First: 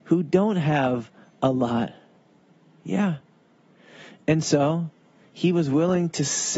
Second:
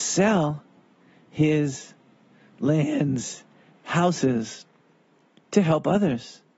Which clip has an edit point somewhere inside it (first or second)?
second